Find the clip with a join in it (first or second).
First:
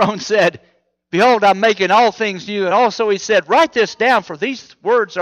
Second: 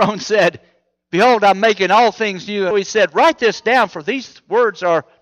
second